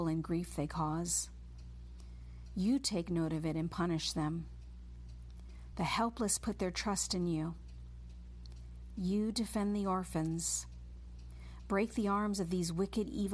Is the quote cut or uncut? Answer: uncut